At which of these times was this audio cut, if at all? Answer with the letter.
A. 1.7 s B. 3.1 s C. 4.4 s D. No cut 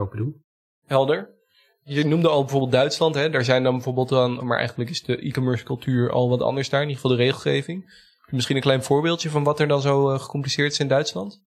C